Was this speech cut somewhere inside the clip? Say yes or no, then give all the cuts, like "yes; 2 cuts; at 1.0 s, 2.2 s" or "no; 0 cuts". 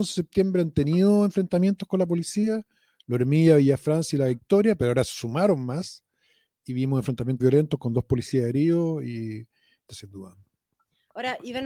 yes; 2 cuts; at 7.4 s, 9.9 s